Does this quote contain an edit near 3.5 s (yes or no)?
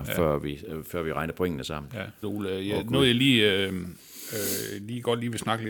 no